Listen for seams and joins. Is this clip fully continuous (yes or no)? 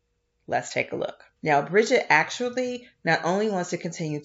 no